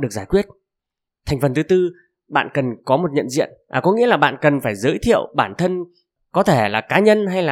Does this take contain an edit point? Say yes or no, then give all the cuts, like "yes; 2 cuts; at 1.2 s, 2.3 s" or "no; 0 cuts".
no; 0 cuts